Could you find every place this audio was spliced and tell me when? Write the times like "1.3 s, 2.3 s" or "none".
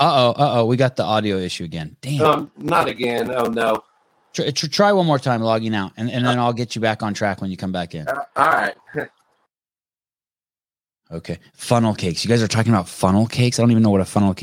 none